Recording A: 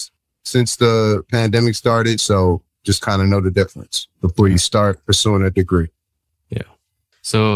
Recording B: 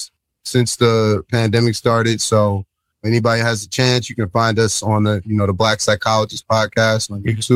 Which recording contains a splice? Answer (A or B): A